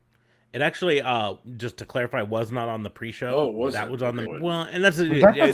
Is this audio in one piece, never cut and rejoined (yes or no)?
no